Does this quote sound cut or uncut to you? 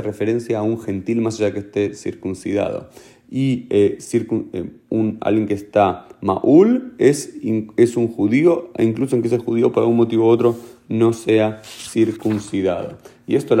uncut